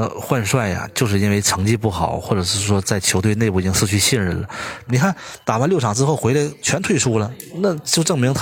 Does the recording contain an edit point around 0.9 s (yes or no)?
no